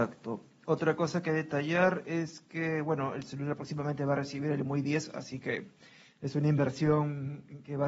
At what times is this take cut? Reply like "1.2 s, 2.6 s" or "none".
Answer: none